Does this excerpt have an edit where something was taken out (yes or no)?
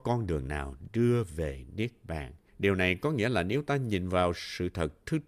yes